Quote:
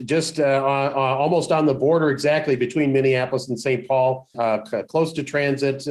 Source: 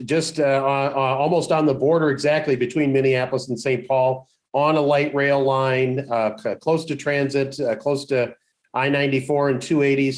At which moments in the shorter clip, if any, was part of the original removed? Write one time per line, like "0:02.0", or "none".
0:04.3